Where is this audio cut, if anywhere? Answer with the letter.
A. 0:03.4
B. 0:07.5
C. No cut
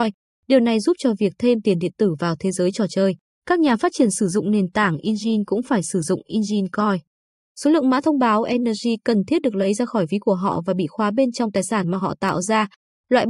C